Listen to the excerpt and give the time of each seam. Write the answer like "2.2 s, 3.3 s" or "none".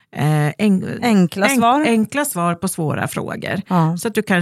1.0 s